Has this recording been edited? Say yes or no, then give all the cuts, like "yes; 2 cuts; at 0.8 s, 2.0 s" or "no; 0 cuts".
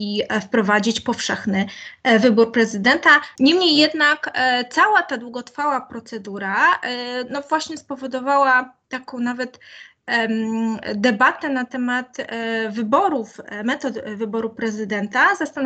yes; 1 cut; at 3.4 s